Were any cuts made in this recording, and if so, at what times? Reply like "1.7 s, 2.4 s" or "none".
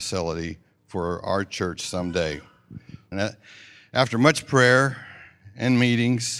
3.1 s